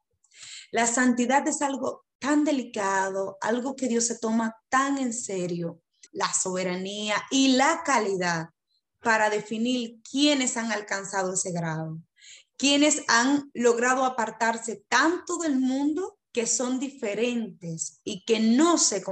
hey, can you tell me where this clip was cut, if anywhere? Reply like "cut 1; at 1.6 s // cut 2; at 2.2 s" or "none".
cut 1; at 6.1 s // cut 2; at 16.2 s